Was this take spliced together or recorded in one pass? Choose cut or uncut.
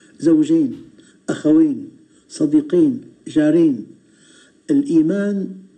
uncut